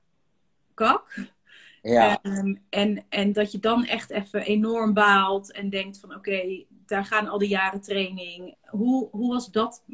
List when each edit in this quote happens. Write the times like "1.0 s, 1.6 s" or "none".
3.3 s, 8.5 s